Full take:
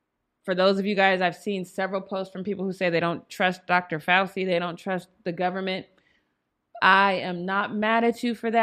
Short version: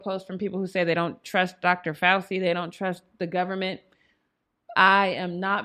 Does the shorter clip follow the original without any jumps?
yes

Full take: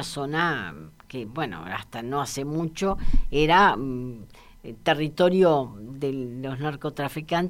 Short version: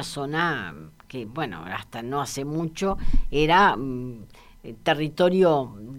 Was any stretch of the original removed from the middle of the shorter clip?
no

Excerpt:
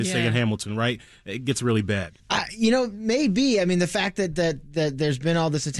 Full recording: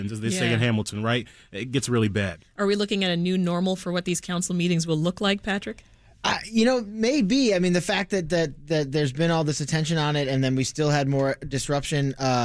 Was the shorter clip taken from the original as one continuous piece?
no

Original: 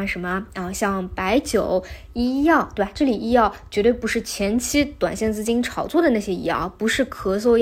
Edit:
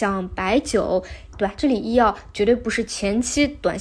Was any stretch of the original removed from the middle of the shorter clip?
yes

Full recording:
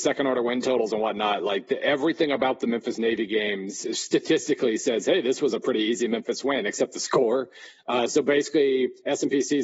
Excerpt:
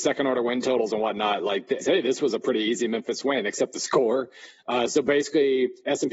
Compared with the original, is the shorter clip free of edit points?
no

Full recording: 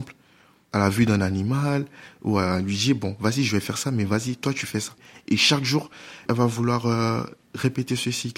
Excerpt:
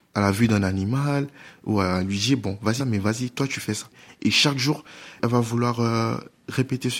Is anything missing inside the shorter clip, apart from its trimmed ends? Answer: yes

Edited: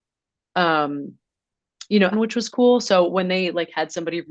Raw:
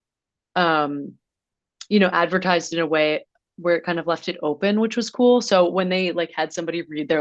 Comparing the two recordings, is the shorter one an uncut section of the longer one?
no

